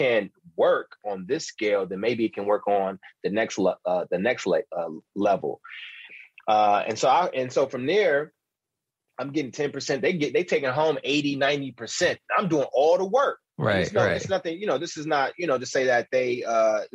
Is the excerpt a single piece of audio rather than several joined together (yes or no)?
yes